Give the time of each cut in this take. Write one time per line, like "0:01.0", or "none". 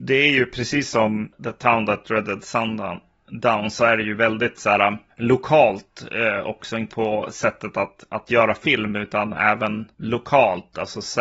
0:06.9